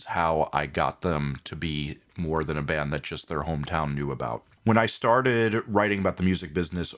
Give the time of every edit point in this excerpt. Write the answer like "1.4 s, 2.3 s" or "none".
4.6 s